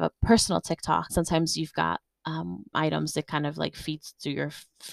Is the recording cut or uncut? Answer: cut